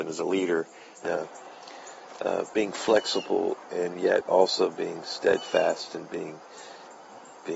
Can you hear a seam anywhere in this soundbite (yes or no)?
yes